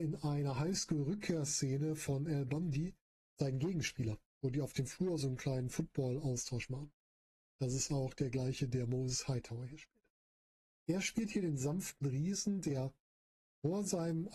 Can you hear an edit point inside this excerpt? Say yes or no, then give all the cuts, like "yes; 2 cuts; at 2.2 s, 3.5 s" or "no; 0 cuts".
no; 0 cuts